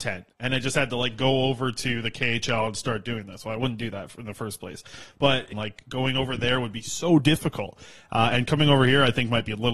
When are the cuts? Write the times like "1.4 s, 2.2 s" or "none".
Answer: 5.5 s